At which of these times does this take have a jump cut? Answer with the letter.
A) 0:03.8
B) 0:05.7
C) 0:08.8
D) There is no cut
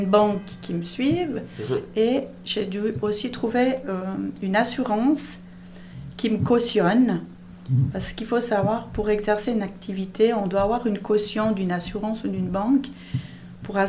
D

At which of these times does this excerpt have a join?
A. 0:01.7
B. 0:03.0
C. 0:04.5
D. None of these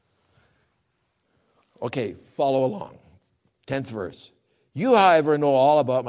D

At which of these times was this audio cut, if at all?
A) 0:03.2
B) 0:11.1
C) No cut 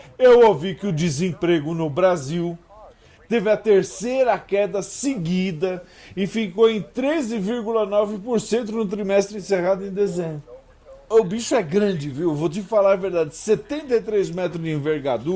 B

